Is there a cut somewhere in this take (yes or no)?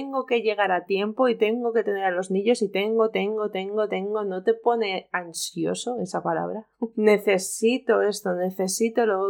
yes